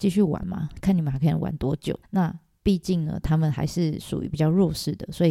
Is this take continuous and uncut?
no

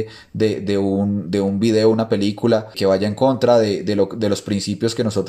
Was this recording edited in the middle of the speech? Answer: yes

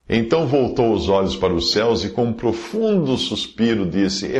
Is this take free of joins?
yes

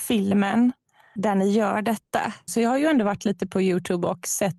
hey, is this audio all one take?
no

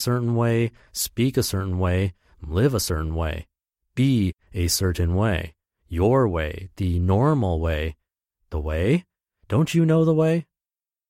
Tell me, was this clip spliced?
yes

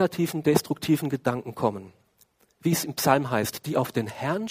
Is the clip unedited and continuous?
yes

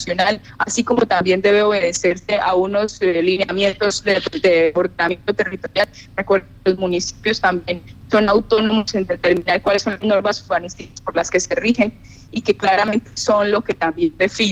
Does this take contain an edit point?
no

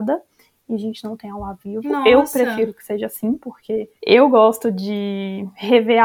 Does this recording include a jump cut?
yes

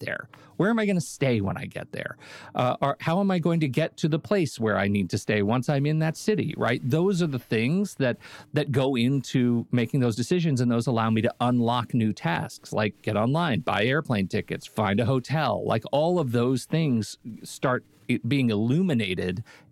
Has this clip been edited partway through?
yes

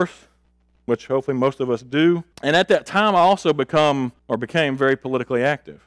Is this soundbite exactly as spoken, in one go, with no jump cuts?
no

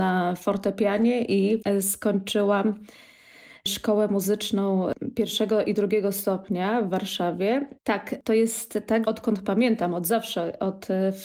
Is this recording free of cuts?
no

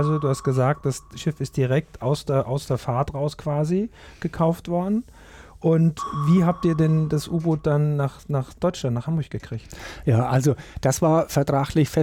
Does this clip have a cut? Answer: no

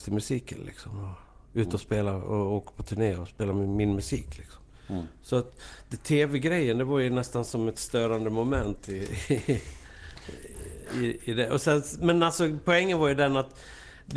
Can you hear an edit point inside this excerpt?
no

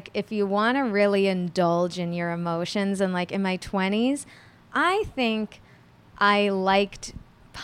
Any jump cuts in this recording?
no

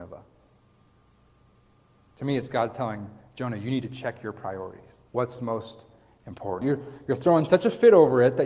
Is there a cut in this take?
yes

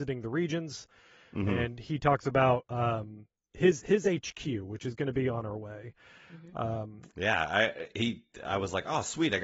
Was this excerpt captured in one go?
yes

